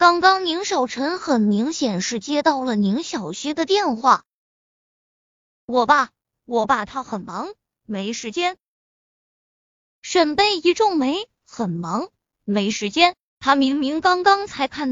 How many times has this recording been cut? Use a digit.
0